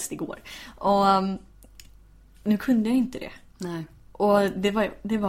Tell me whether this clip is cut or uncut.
uncut